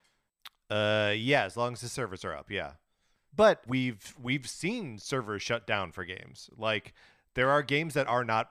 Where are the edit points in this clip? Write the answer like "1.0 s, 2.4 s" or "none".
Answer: 3.7 s